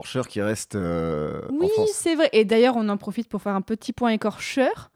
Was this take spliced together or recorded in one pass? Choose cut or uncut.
uncut